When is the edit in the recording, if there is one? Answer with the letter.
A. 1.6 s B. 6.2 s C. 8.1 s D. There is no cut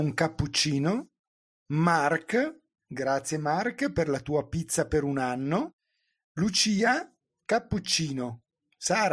D